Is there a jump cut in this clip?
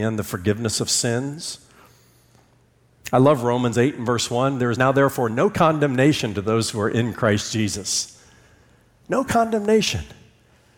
no; 0 cuts

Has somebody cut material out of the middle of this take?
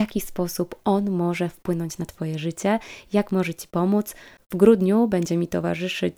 yes; 1 cut; at 4.4 s

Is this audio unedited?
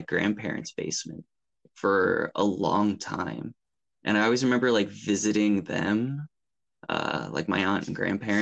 yes; 0 cuts

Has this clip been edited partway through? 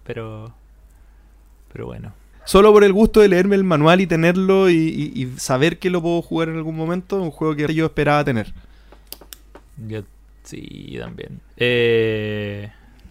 yes; 3 cuts; at 2.3 s, 7.7 s, 11.4 s

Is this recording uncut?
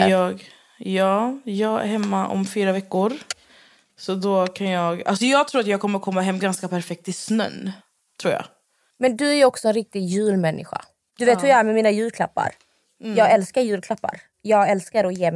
no; 1 cut; at 11.1 s

